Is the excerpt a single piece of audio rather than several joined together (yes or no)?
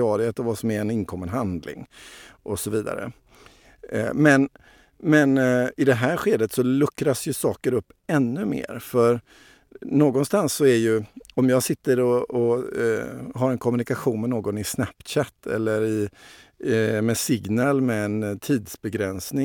yes